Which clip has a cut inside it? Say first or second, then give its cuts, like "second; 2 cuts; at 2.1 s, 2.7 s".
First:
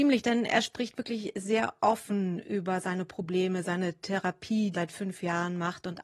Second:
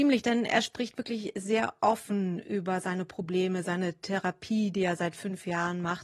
first; 1 cut; at 4.7 s